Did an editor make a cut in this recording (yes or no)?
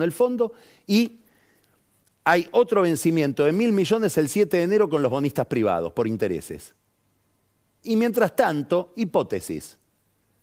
yes